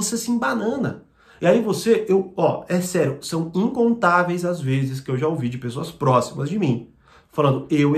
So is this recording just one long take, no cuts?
yes; 0 cuts

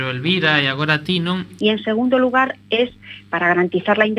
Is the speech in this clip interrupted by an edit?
yes; 1 cut; at 1.6 s

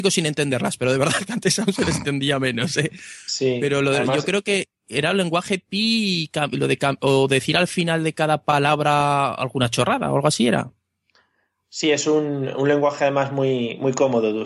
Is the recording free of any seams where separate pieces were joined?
yes; 0 cuts

